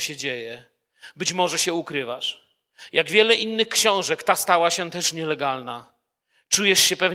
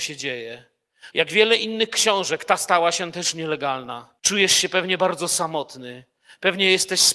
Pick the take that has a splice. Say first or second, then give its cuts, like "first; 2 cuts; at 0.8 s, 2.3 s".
second; 2 cuts; at 1.1 s, 4.2 s